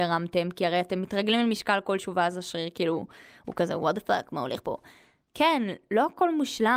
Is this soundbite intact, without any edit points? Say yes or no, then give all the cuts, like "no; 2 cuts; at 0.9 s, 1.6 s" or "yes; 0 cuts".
yes; 0 cuts